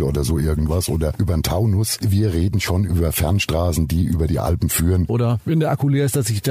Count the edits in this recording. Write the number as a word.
two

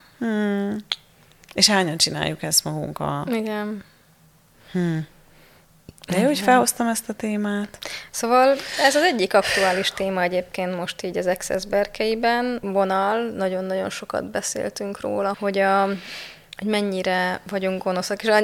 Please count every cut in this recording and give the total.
two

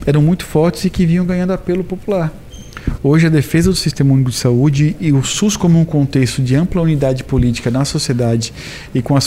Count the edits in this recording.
one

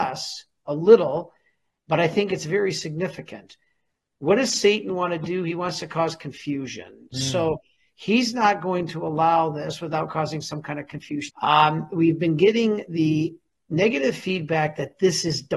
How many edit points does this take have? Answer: one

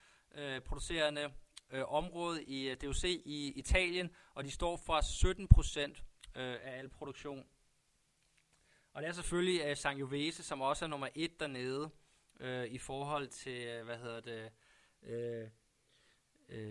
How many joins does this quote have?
one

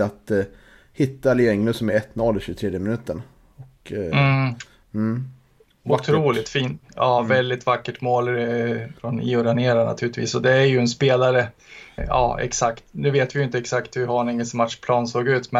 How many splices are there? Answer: two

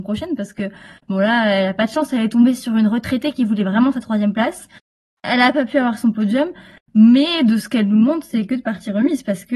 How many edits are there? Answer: one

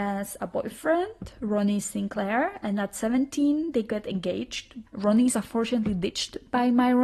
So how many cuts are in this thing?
one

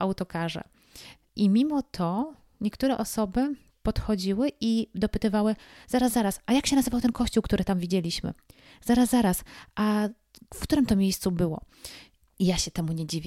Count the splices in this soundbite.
zero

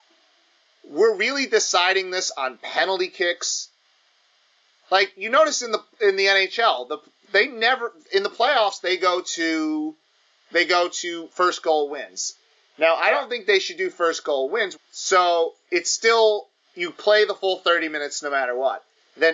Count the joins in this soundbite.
one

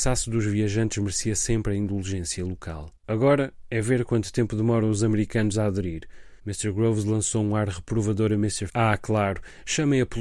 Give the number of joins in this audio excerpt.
two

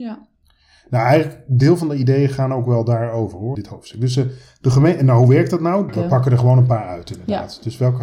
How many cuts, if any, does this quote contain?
two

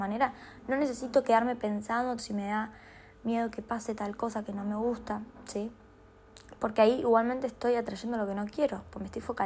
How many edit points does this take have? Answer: one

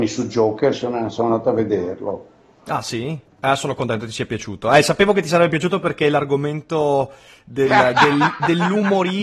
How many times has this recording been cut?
one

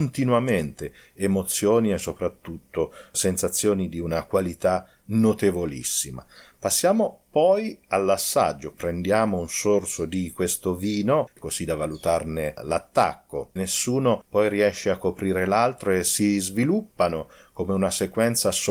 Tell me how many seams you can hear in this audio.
two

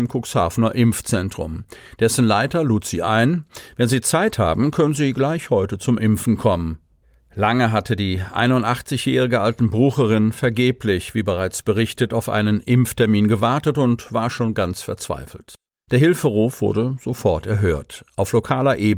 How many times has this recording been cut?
one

